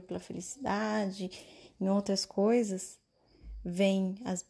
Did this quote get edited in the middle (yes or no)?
no